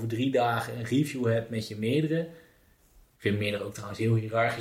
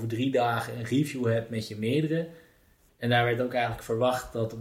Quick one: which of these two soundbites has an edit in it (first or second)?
second